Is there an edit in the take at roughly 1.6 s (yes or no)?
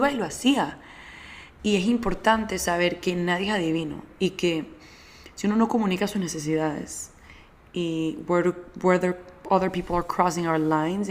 yes